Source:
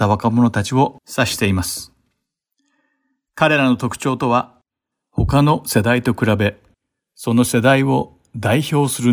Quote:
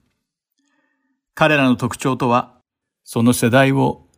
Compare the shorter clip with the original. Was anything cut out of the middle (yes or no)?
yes